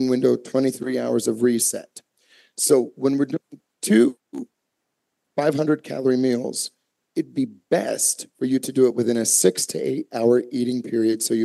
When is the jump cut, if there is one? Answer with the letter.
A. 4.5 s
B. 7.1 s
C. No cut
C